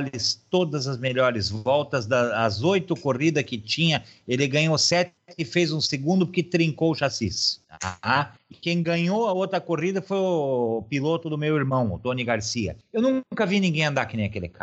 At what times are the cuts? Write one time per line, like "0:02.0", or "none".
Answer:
0:08.5